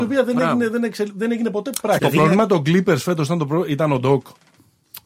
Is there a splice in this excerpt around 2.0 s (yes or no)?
yes